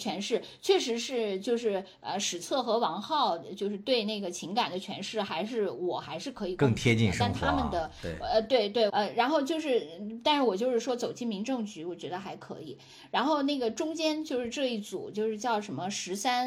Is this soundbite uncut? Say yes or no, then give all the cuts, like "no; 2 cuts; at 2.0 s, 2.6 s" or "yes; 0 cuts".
no; 1 cut; at 8.9 s